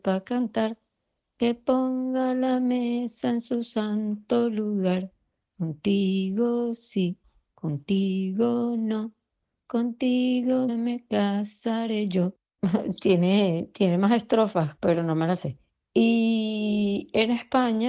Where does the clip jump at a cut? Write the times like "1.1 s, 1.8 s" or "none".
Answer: 10.7 s